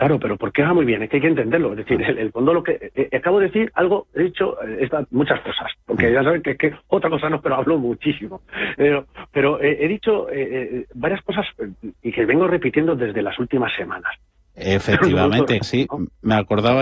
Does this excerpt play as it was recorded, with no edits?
no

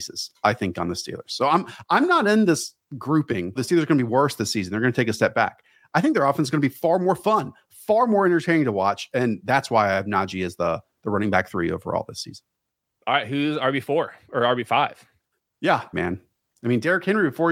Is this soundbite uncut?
no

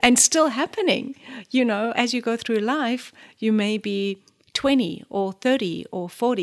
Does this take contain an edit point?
yes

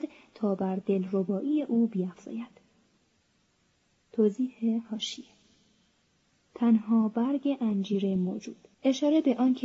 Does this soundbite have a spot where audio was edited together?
yes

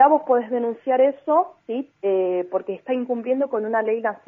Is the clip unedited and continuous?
yes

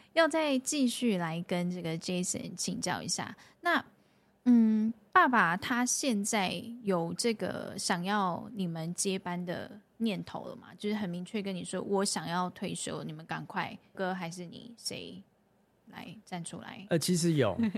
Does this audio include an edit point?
yes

